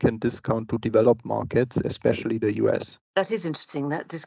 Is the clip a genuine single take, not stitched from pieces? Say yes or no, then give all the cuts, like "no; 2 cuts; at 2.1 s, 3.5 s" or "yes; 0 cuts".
yes; 0 cuts